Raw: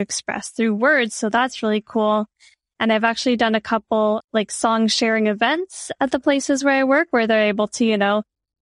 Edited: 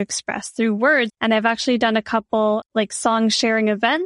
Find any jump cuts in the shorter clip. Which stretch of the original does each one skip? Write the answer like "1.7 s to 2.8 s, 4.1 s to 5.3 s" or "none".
1.1 s to 2.7 s